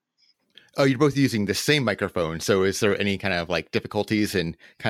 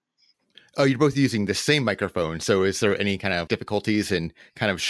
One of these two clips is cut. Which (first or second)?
second